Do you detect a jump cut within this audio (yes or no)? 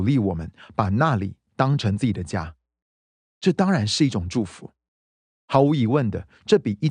no